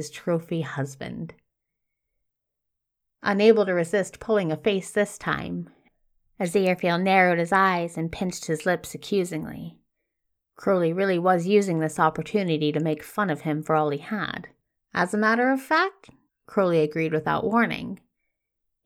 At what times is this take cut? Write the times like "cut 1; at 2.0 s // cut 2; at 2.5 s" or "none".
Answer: cut 1; at 14.8 s // cut 2; at 16.3 s